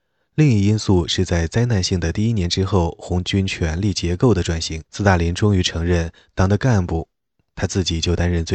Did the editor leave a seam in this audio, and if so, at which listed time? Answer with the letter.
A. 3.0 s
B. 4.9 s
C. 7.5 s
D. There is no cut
B